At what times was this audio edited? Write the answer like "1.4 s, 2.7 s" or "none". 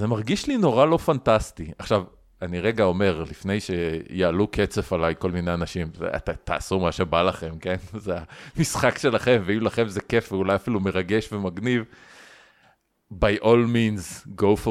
none

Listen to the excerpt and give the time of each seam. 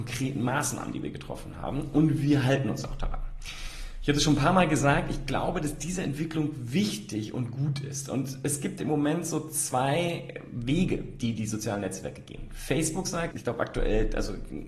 8.8 s, 13.3 s

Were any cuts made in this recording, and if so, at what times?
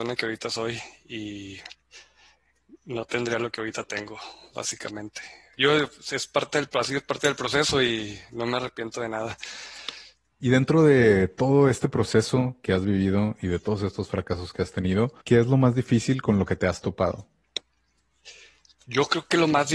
10.3 s, 15.2 s

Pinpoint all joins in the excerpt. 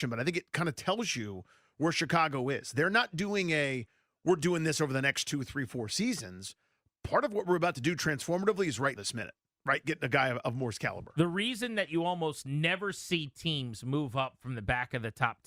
9.0 s

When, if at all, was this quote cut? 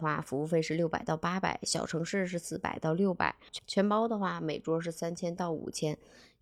none

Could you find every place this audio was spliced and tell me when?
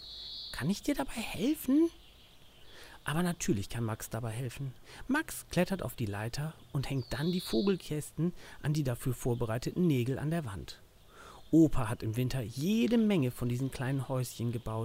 none

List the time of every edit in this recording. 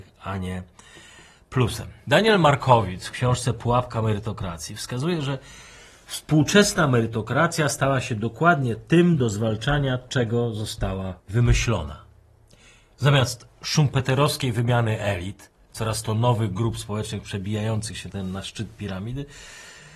11.2 s

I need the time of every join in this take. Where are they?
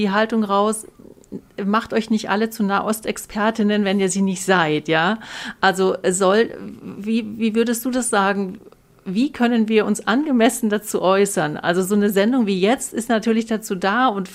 none

